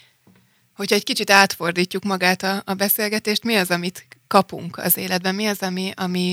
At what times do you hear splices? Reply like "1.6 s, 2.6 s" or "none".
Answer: none